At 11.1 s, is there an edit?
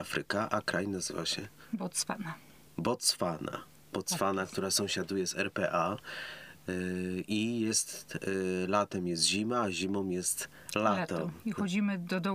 no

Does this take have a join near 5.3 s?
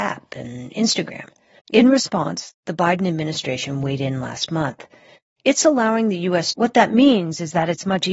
no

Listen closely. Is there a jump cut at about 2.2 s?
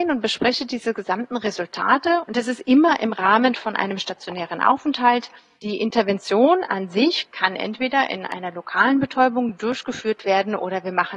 yes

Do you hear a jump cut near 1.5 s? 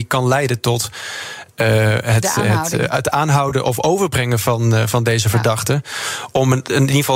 no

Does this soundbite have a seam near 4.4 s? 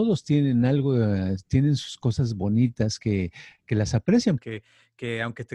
yes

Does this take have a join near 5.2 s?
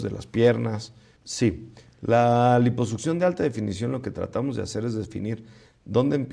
no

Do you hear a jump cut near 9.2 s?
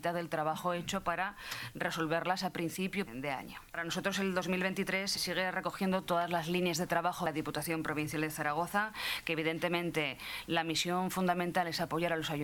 no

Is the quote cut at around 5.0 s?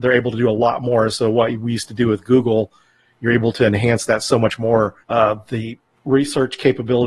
yes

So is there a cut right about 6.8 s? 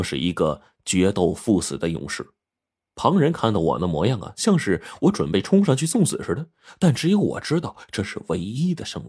no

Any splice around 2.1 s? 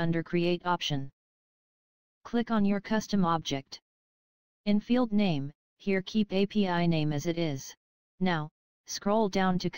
no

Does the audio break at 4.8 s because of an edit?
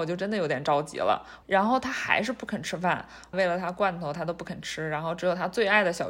no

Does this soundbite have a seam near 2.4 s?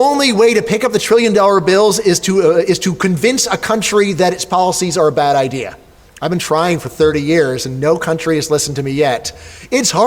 no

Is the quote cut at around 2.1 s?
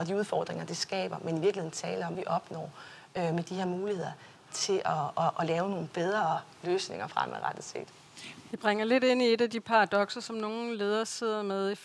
yes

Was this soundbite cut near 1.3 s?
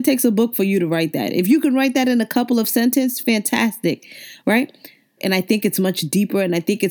no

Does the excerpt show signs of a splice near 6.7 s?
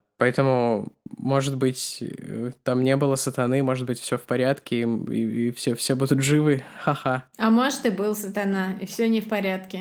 no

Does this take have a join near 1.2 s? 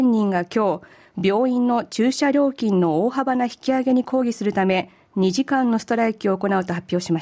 no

